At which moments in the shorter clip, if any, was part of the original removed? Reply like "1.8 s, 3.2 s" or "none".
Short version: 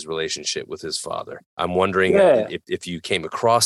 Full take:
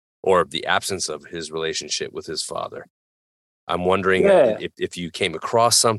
1.5 s

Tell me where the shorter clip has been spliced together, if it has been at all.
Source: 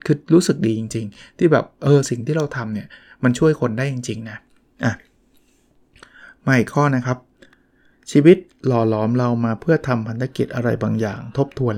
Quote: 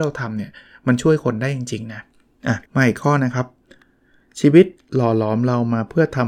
2.7 s

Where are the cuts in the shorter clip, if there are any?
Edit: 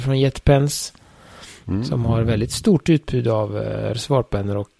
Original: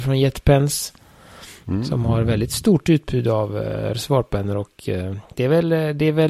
none

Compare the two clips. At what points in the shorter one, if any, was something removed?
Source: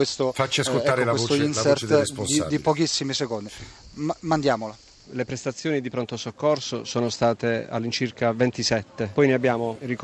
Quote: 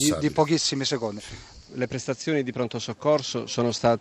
1.6 s

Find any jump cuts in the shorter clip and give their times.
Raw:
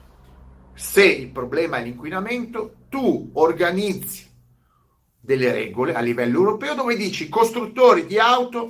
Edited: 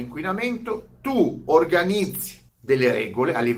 2.5 s

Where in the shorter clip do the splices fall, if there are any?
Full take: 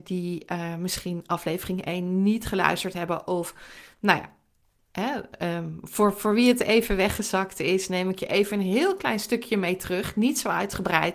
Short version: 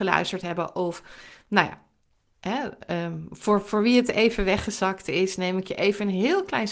none

